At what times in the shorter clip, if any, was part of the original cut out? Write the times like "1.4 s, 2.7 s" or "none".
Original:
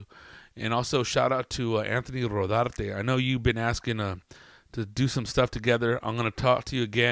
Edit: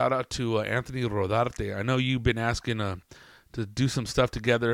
none